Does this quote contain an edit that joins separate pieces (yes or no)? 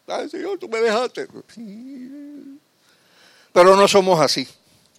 yes